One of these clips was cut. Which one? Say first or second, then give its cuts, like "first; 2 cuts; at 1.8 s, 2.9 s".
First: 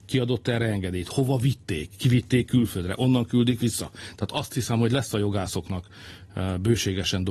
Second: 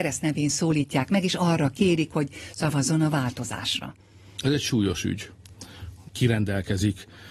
second; 1 cut; at 6.1 s